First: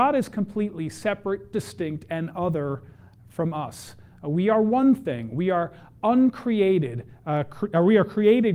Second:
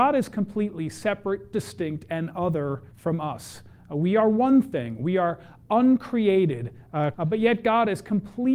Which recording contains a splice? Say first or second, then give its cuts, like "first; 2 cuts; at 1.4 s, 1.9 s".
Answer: second; 2 cuts; at 2.9 s, 7.1 s